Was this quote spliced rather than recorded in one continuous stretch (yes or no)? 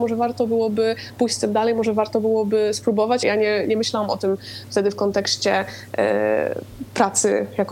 yes